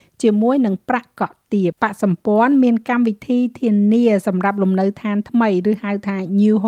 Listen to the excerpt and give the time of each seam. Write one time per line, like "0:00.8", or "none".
0:01.7

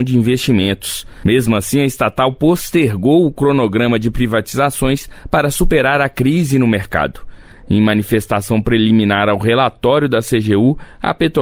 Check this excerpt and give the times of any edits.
0:07.5

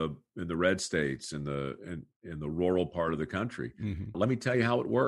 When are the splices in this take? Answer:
0:04.1

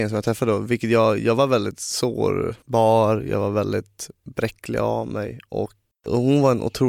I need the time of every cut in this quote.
0:05.9

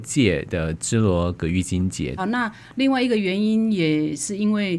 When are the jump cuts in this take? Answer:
0:02.2

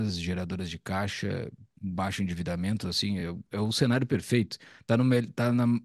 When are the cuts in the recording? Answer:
none

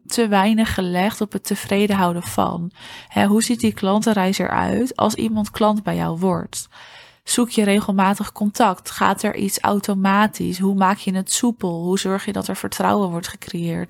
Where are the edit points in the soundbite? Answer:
none

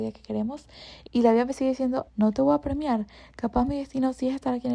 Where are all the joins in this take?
0:01.0
0:02.1

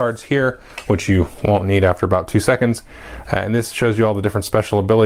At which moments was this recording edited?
none

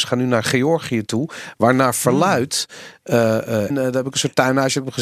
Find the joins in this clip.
0:03.7

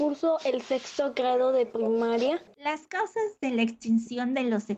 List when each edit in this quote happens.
0:02.5

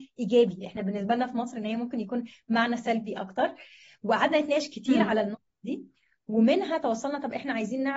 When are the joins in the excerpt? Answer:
none

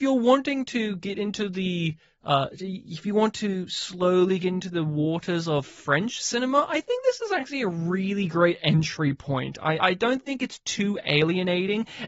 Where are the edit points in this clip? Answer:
0:09.8

